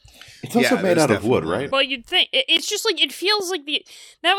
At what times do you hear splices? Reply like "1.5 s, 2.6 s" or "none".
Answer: 1.7 s

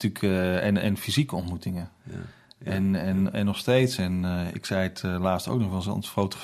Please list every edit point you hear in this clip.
2.0 s

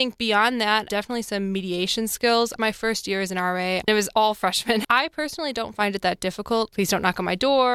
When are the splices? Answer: 4.8 s, 6.7 s

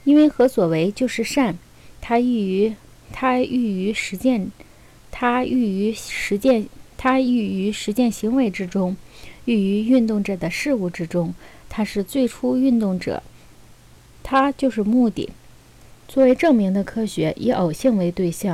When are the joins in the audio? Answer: 15.9 s

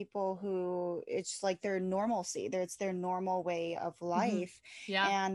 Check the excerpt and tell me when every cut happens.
none

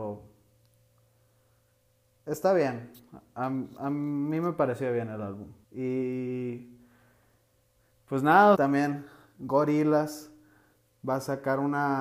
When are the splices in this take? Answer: 5.6 s, 8.5 s

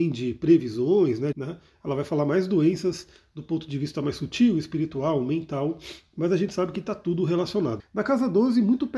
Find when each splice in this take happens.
1.3 s, 7.8 s

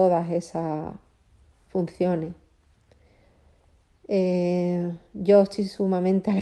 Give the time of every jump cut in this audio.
none

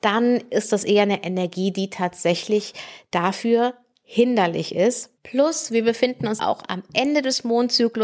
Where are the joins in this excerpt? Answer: 5.2 s, 6.4 s

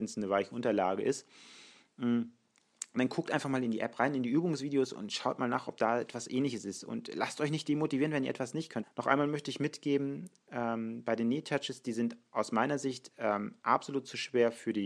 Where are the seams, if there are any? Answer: 8.8 s

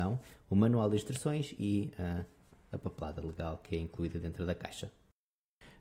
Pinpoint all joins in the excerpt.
none

